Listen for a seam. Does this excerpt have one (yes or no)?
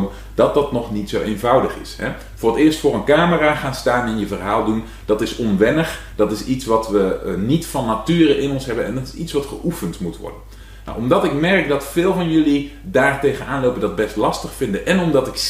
no